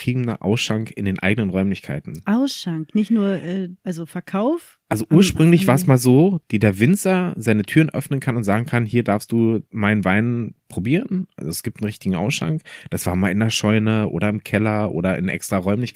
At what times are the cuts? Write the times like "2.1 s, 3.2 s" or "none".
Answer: 3.8 s, 6.4 s